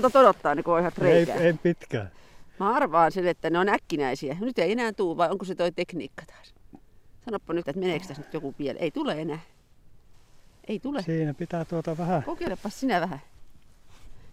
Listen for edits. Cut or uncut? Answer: cut